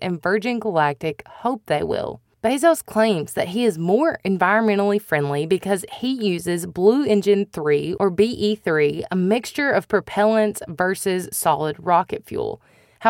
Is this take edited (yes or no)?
no